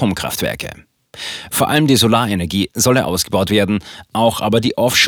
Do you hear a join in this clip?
yes; 1 cut; at 1.5 s

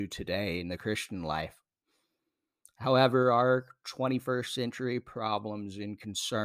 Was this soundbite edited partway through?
no; 0 cuts

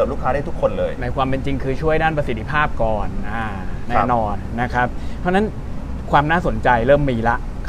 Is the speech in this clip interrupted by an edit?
no; 0 cuts

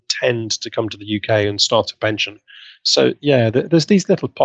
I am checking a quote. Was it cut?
no; 0 cuts

